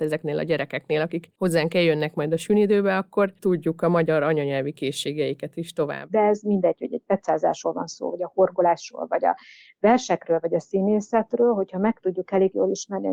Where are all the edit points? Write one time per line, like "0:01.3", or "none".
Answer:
0:03.4
0:06.1